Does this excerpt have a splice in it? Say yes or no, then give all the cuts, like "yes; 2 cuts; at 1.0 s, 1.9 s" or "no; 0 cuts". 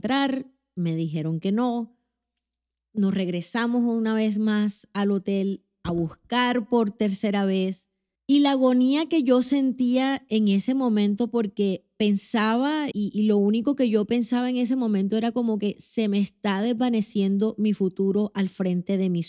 yes; 2 cuts; at 8.2 s, 12.9 s